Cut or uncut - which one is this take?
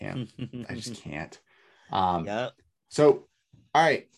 uncut